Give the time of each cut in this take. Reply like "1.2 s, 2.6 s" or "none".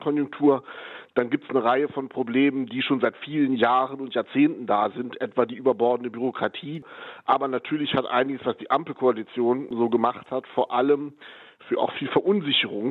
none